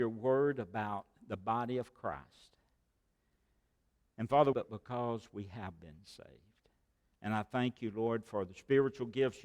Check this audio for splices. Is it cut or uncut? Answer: cut